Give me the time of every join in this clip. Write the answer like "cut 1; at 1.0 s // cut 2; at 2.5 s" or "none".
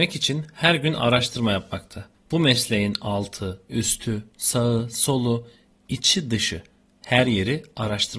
none